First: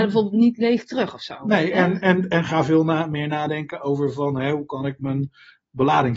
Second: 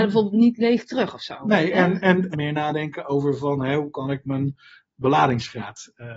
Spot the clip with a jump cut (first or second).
second